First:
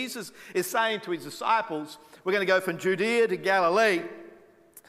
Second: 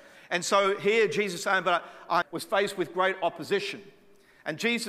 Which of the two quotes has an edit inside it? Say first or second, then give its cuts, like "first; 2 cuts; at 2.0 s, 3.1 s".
second; 1 cut; at 2.2 s